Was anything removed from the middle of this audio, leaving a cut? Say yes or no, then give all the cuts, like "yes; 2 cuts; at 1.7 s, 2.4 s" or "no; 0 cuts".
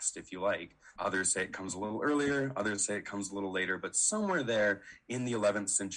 yes; 1 cut; at 1.0 s